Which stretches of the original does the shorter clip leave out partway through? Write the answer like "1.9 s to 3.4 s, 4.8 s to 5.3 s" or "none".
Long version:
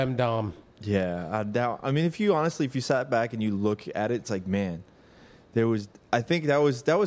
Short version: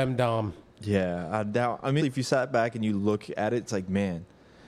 2.0 s to 2.6 s